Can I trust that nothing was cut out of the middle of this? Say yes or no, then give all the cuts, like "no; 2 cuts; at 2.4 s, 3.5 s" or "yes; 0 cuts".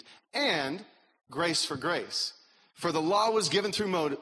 no; 1 cut; at 2.7 s